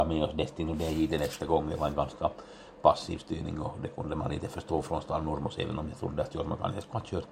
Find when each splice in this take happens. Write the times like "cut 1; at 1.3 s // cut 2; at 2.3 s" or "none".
none